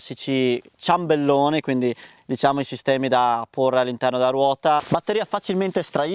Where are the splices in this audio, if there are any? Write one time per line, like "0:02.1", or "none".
none